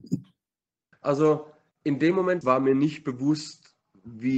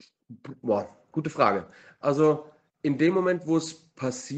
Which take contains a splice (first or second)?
first